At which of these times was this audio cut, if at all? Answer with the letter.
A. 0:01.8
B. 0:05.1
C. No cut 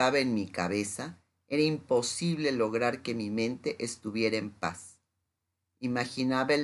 C